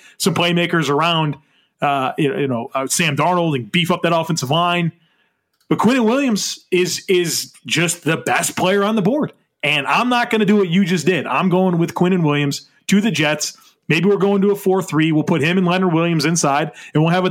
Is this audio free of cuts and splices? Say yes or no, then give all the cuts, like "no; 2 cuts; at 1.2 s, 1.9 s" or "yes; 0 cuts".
yes; 0 cuts